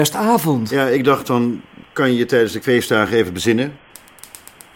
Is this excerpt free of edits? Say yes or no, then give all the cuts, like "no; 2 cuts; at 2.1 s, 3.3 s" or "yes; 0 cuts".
yes; 0 cuts